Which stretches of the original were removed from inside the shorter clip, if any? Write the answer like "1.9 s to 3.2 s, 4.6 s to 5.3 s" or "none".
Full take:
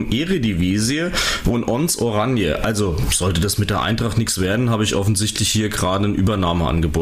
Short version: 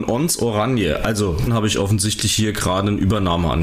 3.1 s to 4.6 s